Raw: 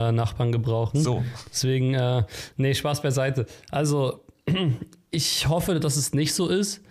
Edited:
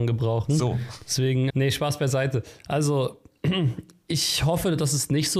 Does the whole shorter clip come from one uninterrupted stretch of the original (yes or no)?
no